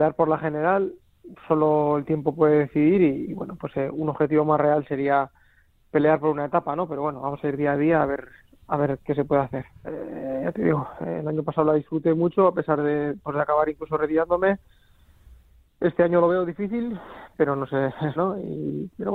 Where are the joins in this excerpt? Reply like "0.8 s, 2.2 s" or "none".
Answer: 9.8 s, 18.2 s